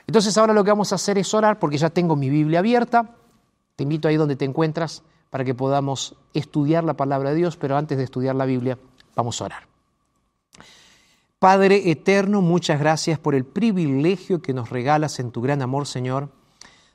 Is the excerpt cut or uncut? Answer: uncut